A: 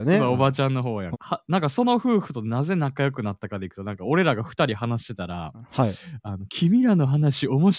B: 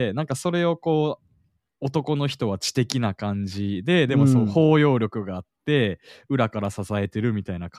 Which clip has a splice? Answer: A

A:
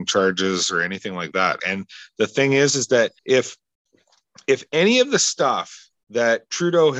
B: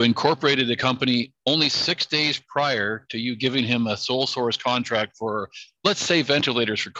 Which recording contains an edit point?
A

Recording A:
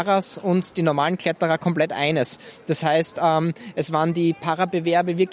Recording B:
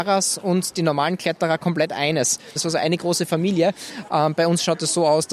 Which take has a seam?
B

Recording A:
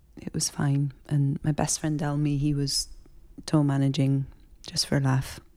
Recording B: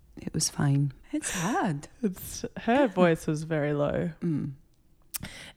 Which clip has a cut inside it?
B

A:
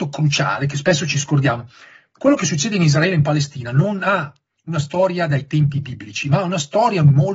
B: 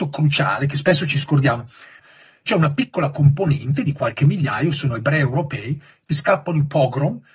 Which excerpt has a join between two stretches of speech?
B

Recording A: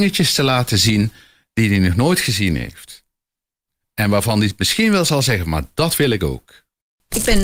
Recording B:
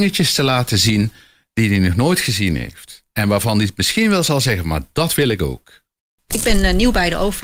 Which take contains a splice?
B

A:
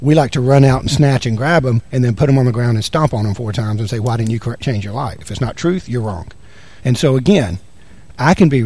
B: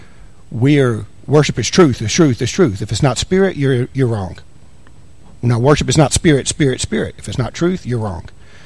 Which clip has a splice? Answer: A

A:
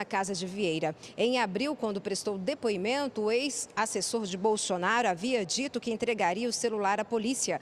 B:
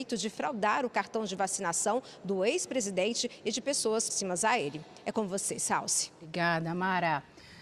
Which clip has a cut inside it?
B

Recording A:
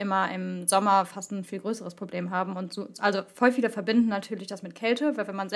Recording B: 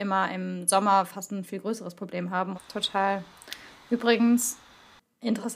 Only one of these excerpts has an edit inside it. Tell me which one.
B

